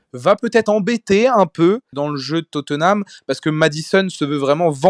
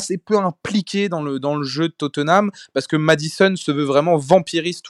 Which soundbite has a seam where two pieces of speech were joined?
first; 1 cut; at 1.9 s

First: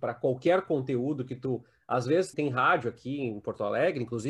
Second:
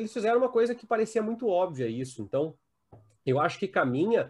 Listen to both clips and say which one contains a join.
first; 1 cut; at 2.3 s

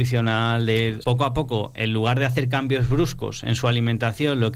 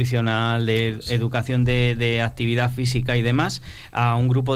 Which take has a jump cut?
first; 1 cut; at 1.0 s

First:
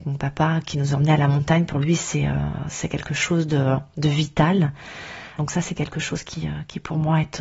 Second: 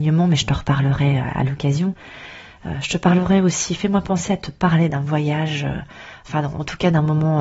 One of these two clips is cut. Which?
first; 1 cut; at 5.4 s

